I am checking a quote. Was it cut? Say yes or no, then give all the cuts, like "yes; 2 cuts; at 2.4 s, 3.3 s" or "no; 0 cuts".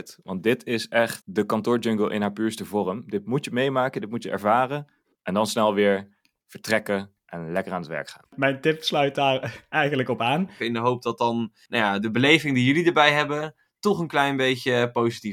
yes; 2 cuts; at 10.6 s, 12.0 s